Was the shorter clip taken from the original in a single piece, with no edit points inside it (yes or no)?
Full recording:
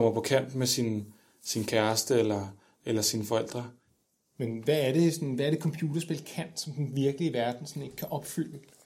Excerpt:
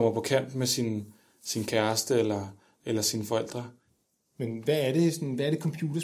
yes